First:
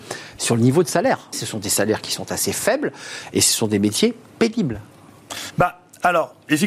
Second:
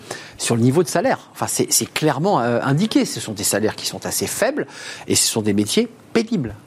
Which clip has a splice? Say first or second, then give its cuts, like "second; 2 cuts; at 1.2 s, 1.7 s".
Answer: first; 2 cuts; at 1.3 s, 5.5 s